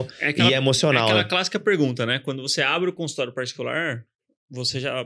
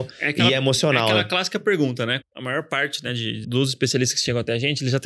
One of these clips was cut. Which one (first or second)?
second